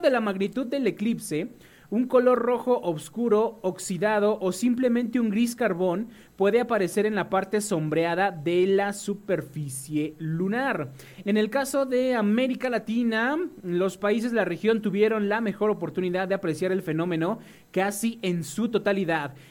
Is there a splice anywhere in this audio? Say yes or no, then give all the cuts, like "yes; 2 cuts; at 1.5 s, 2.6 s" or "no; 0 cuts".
yes; 1 cut; at 11.2 s